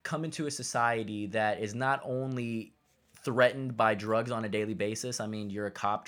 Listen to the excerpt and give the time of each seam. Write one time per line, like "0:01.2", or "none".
none